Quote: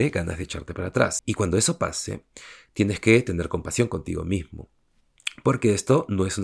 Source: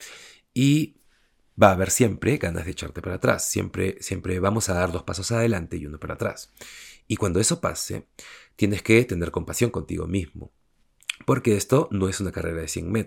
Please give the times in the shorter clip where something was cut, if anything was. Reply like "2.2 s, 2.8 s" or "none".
1.2 s